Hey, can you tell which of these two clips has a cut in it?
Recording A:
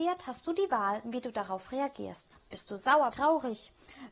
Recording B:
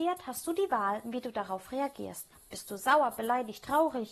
A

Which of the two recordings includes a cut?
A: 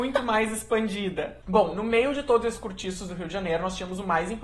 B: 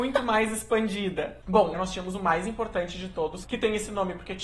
B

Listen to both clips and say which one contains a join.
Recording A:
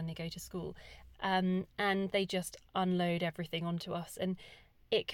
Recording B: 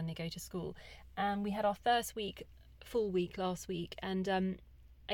A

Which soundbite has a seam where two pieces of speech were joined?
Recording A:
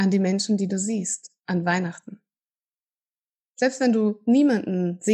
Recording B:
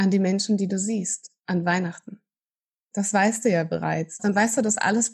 B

